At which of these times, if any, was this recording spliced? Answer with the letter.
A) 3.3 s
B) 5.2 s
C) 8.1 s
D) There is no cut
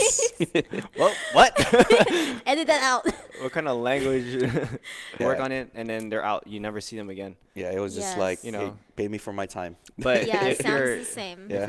B